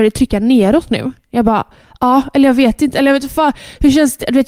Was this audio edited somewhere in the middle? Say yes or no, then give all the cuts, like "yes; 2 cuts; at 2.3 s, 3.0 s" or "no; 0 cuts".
no; 0 cuts